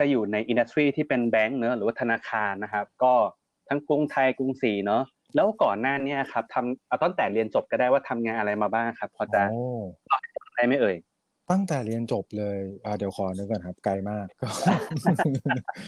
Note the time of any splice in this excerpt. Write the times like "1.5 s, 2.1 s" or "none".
14.3 s